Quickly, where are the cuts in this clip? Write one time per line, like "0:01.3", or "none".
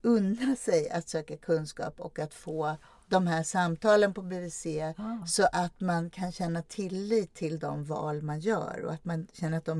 none